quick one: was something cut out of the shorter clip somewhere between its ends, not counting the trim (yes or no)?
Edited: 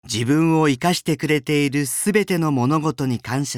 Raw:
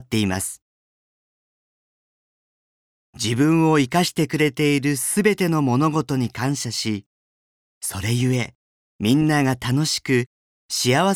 no